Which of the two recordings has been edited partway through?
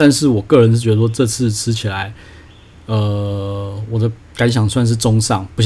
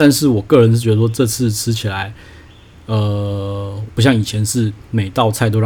second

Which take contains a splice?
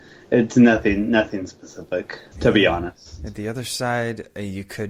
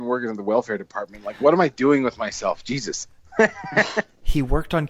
first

